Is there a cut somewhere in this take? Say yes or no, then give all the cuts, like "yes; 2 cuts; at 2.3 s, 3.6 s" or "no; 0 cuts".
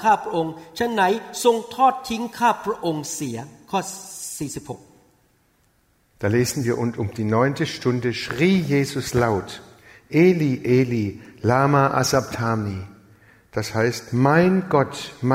no; 0 cuts